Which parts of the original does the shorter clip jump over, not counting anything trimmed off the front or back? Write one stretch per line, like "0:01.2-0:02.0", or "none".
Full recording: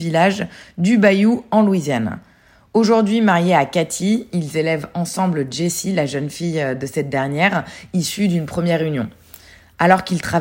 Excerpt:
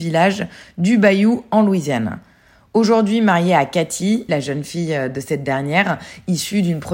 0:04.3-0:05.9